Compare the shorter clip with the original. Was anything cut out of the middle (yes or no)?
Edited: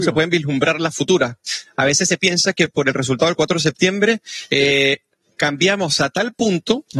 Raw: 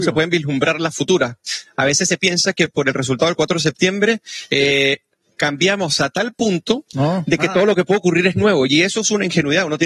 no